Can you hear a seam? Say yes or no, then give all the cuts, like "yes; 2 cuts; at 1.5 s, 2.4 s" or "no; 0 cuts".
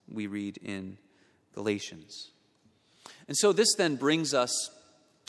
no; 0 cuts